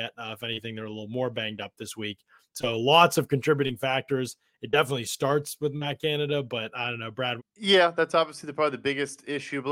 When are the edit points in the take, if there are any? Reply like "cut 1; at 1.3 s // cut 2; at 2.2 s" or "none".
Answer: cut 1; at 7.4 s